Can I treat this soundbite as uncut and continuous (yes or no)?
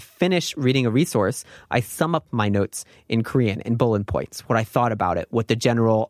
yes